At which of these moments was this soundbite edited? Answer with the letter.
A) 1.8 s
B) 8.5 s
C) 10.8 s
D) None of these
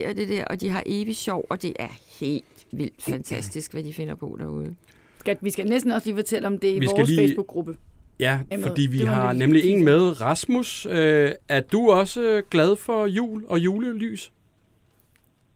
B